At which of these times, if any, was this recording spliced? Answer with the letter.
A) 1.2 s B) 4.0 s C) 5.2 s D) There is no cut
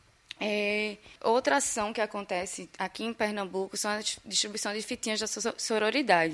A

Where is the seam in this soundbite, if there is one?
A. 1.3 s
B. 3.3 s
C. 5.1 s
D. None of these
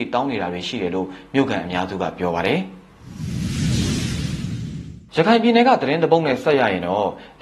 C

